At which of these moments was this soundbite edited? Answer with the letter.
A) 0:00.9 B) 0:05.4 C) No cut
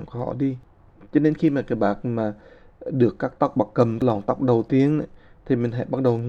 A